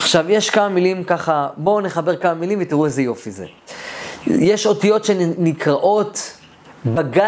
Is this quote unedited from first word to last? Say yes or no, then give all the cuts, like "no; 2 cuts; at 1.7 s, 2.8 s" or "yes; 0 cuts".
no; 1 cut; at 4.2 s